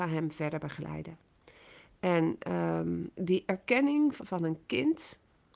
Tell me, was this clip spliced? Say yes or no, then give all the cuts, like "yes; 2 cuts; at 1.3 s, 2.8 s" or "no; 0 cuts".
yes; 2 cuts; at 3.1 s, 4.2 s